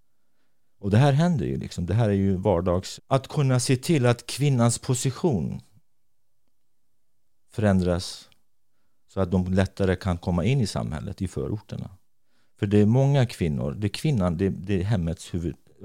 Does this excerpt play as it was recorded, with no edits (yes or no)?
no